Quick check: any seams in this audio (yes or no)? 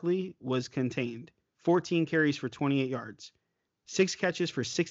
no